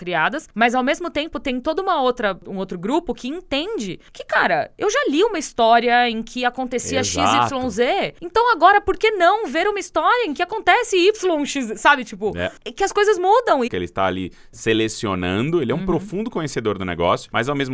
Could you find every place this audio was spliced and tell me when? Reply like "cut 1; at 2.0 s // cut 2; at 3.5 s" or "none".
cut 1; at 13.7 s